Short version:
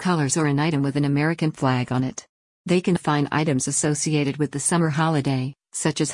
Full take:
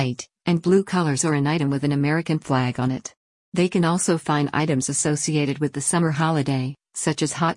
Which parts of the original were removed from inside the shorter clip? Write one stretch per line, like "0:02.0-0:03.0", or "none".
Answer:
0:03.8-0:04.2